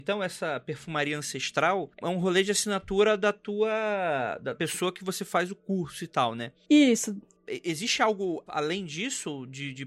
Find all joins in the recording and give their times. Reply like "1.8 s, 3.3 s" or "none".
2.0 s, 4.5 s